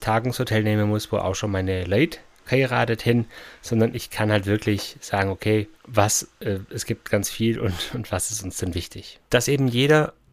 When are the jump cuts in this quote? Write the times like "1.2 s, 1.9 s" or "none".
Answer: 5.7 s, 9.3 s